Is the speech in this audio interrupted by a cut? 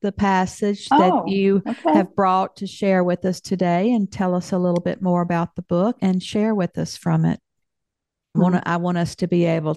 yes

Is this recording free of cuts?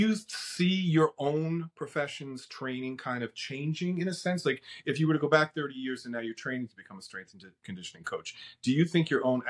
yes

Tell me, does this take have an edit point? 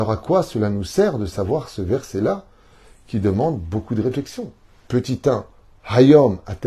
no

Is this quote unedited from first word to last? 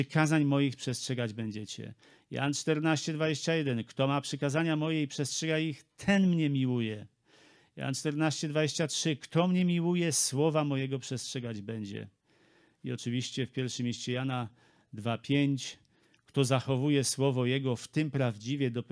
yes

